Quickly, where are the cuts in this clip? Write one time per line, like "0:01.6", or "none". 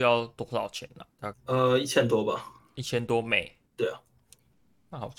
0:01.3
0:03.7